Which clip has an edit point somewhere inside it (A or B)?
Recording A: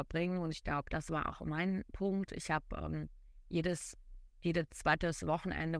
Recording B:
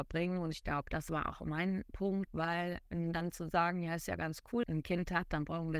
B